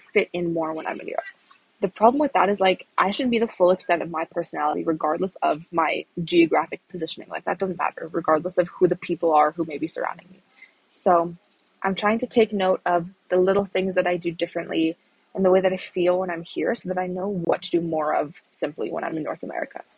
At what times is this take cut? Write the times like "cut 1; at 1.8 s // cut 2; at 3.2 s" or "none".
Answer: none